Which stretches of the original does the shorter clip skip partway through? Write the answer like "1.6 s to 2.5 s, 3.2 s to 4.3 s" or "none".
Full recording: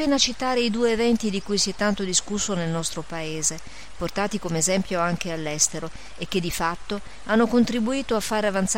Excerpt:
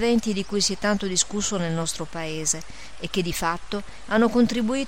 3.9 s to 6.1 s